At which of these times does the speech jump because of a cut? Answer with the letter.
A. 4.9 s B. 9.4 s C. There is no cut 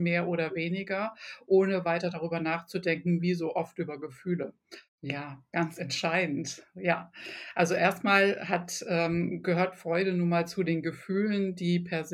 A